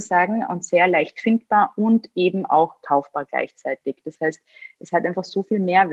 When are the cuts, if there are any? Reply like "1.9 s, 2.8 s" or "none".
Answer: none